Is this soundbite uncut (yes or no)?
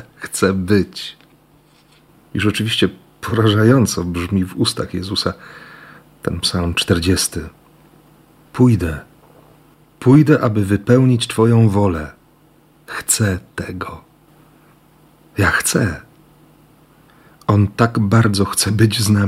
yes